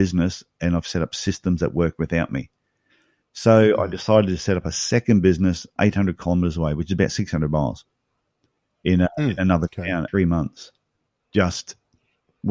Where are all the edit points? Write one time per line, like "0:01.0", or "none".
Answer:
0:05.8
0:10.1